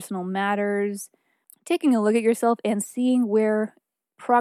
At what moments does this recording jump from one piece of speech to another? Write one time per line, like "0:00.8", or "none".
none